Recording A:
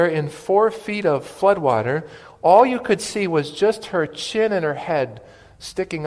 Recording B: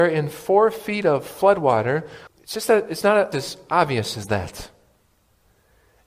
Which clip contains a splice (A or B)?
B